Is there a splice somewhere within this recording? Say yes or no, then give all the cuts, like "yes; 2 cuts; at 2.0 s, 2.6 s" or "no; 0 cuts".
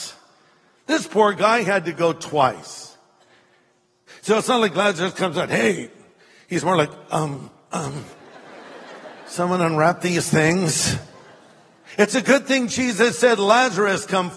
yes; 1 cut; at 4.1 s